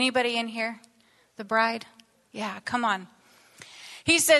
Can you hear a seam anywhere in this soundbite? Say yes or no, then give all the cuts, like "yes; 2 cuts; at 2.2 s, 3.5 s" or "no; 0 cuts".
no; 0 cuts